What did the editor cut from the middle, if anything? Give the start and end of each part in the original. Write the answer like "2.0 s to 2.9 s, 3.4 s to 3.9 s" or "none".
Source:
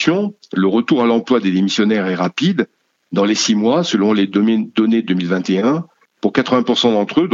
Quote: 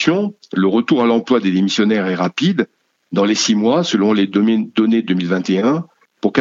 none